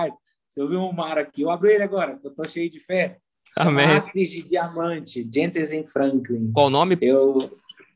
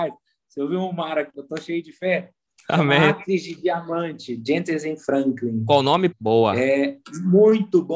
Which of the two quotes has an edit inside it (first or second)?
second